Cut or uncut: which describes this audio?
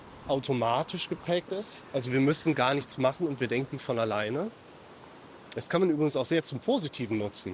uncut